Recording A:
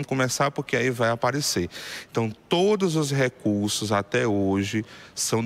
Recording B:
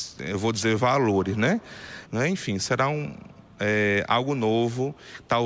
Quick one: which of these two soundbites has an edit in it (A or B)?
B